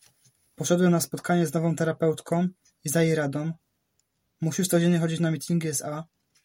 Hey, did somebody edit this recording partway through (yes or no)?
no